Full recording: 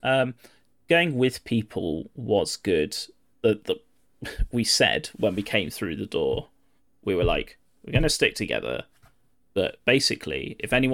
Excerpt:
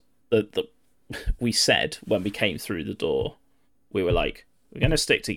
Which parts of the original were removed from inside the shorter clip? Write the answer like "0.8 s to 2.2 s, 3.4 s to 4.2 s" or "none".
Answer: none

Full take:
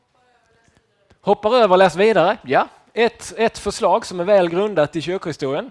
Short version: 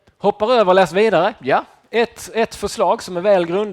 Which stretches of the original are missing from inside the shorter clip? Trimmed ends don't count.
none

